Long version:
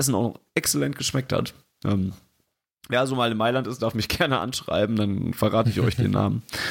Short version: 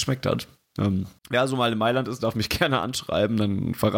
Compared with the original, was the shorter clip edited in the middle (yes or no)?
yes